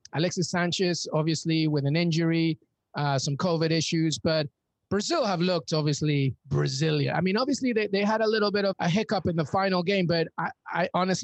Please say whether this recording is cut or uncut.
cut